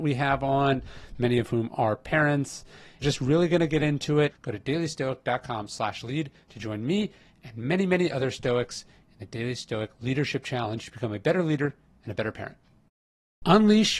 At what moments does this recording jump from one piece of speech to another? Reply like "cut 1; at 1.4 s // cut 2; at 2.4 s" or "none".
cut 1; at 4.3 s